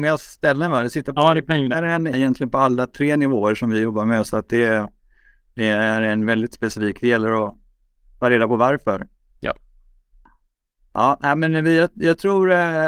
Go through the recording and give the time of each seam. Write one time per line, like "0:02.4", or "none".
0:02.1